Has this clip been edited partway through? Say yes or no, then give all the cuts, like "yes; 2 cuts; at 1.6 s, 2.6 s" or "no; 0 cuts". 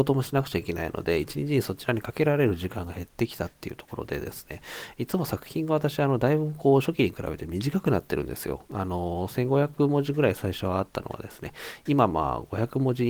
no; 0 cuts